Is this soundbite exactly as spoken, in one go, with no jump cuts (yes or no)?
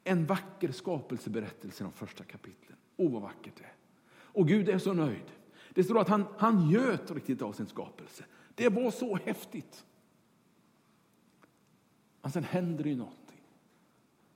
yes